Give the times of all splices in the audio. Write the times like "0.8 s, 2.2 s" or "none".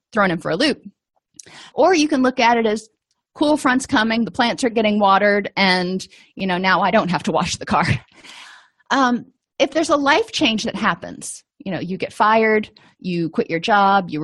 1.7 s, 8.1 s